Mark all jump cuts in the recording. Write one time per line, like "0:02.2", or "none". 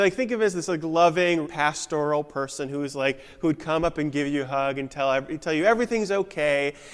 0:01.4